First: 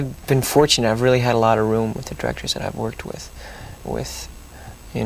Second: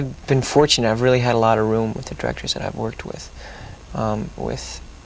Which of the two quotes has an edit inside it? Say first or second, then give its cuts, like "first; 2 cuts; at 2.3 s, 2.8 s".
first; 1 cut; at 3.8 s